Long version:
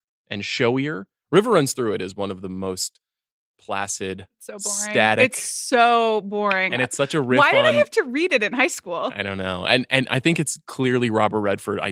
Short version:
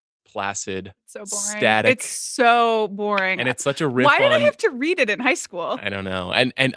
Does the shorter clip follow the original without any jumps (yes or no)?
yes